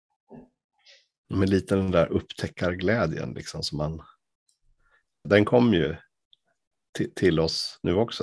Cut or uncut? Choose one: cut